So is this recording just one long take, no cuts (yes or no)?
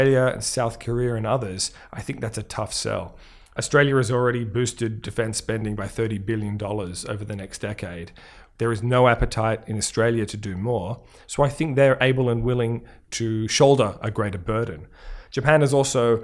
no